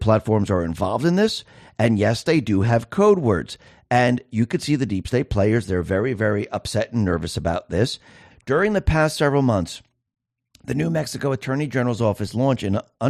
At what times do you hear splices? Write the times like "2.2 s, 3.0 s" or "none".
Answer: 8.3 s